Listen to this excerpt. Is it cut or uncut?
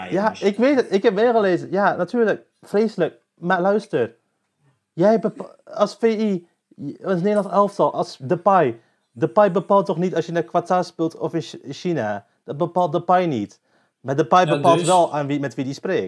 uncut